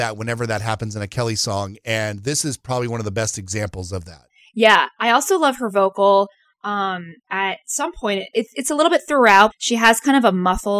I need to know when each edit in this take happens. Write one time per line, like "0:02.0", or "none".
0:09.5